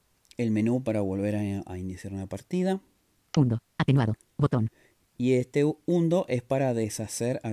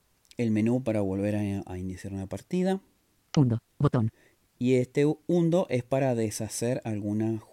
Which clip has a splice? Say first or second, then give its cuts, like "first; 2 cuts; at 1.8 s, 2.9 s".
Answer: second; 1 cut; at 3.7 s